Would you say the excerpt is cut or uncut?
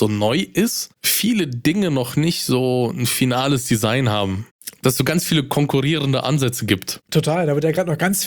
uncut